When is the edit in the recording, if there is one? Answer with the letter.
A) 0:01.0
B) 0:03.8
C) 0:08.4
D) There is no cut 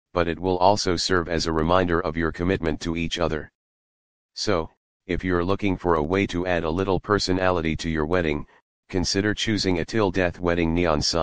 D